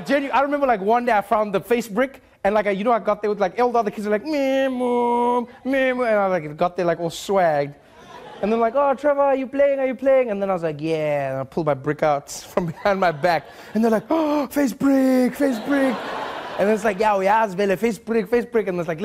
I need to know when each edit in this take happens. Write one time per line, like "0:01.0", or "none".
none